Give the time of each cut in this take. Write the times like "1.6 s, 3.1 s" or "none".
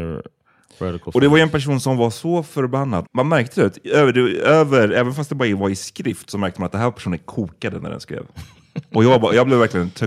3.1 s